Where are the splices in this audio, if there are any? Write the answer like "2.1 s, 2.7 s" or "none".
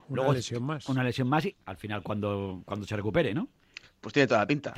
1.5 s